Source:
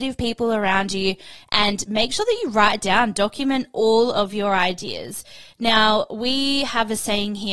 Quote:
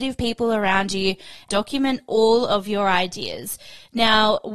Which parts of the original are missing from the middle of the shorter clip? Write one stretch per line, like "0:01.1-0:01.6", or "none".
0:01.5-0:03.1